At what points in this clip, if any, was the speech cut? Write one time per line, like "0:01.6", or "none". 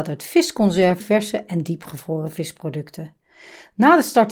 0:01.0